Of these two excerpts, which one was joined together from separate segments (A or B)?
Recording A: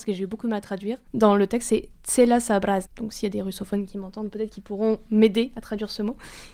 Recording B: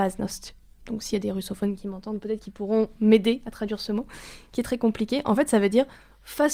A